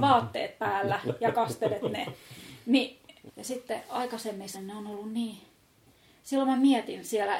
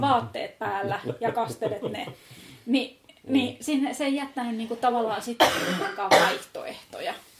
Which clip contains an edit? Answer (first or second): first